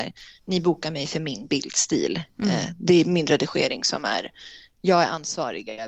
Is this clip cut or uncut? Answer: uncut